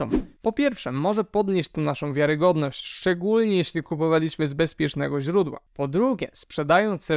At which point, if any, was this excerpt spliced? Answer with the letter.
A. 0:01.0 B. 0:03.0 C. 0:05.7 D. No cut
C